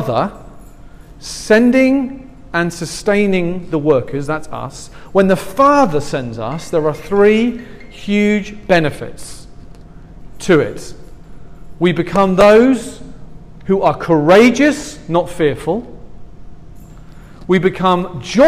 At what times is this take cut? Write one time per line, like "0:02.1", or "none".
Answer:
none